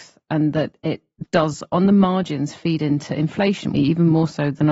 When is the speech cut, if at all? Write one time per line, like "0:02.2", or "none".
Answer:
0:03.7